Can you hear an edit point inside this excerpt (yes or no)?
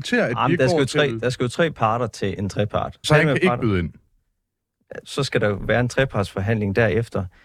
yes